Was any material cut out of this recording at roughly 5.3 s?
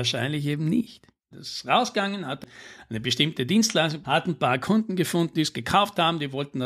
yes; 3 cuts; at 1.3 s, 4.0 s, 5.3 s

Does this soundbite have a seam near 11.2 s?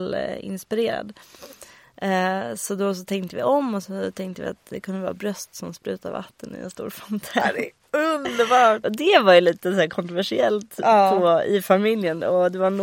no; 1 cut; at 8.8 s

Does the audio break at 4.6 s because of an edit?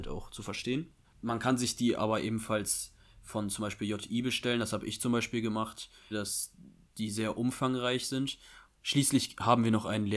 no; 3 cuts; at 1.1 s, 6.1 s, 8.7 s

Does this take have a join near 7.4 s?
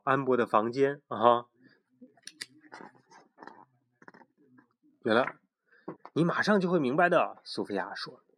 no; 1 cut; at 6.0 s

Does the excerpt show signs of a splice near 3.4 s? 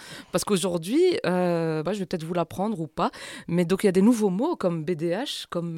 no; 1 cut; at 1.9 s

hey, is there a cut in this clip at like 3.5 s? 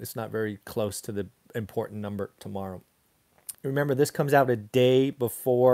yes; 1 cut; at 3.5 s

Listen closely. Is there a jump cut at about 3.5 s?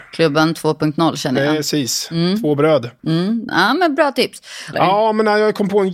yes; 2 cuts; at 3.5 s, 4.7 s

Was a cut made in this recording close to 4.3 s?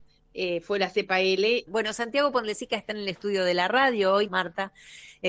yes; 2 cuts; at 1.7 s, 4.3 s

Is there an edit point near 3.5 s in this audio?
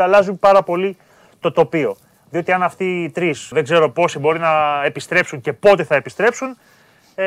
yes; 1 cut; at 3.5 s

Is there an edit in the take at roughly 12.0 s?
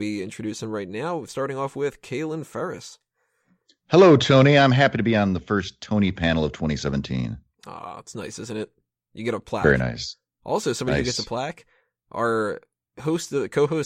no; 0 cuts

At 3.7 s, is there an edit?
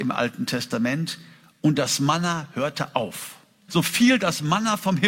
yes; 1 cut; at 3.7 s

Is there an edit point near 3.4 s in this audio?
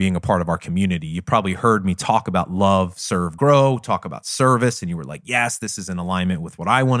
no; 0 cuts

